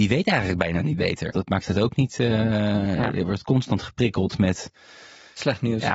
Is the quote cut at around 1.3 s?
yes; 1 cut; at 1.3 s

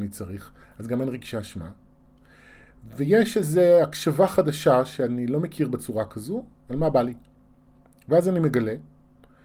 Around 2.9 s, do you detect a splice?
no; 0 cuts

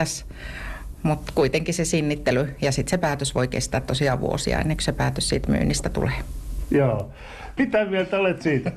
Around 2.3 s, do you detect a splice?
no; 1 cut; at 7.6 s

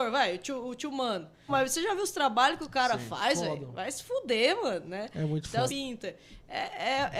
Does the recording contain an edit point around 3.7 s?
no; 2 cuts; at 1.5 s, 5.7 s

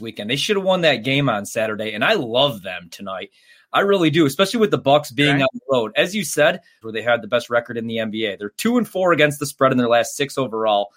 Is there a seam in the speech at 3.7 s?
no; 1 cut; at 6.8 s

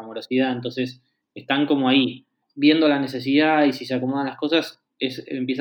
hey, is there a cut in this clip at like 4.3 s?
no; 1 cut; at 2.4 s

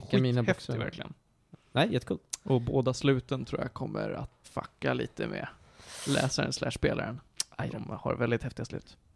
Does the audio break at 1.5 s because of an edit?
yes; 2 cuts; at 1.5 s, 4.4 s

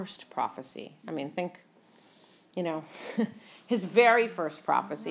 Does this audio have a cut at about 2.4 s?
no; 0 cuts

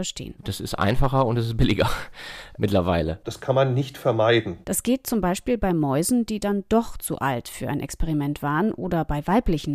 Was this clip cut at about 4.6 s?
yes; 2 cuts; at 3.2 s, 4.6 s

